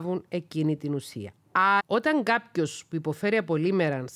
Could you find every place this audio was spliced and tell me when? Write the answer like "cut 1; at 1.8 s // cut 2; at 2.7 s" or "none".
cut 1; at 1.8 s